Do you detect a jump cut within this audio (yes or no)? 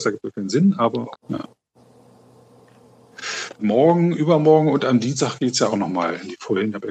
yes